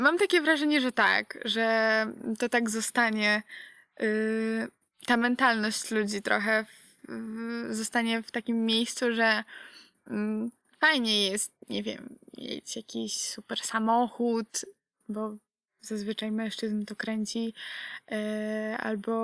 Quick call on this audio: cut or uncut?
uncut